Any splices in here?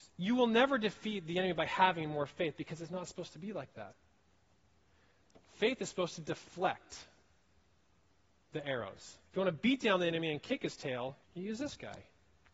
yes; 2 cuts; at 9.3 s, 11.2 s

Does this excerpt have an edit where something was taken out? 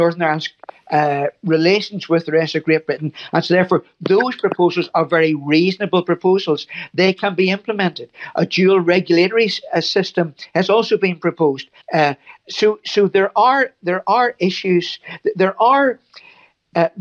yes; 1 cut; at 11.8 s

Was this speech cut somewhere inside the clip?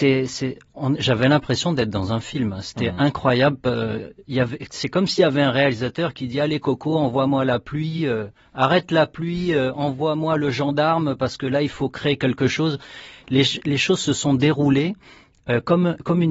no; 0 cuts

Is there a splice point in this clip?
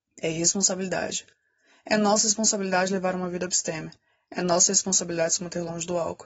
no; 0 cuts

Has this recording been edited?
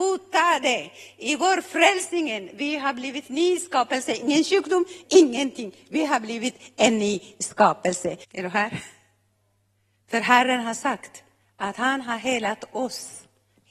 yes; 2 cuts; at 5.0 s, 8.2 s

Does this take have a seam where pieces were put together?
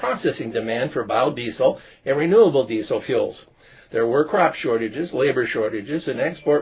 no; 0 cuts

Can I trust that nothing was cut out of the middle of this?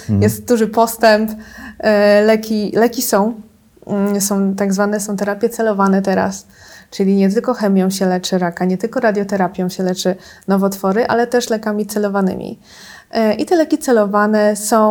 yes; 0 cuts

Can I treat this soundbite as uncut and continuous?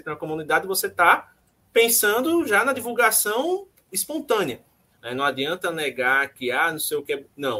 no; 1 cut; at 5.0 s

